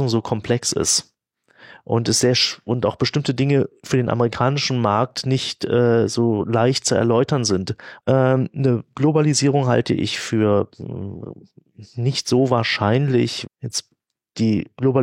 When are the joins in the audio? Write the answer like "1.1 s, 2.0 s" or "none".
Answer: 8.0 s, 13.5 s